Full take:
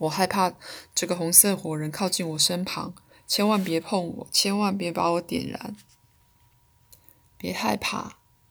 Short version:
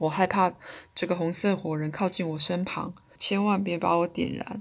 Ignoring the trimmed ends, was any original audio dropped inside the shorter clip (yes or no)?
yes